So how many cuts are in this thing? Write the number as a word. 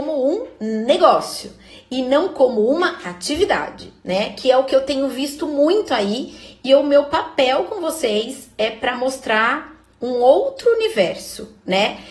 zero